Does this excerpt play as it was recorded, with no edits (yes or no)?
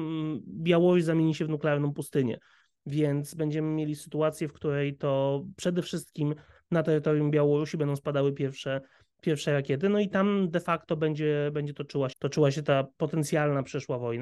no